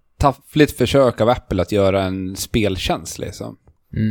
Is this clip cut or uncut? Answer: uncut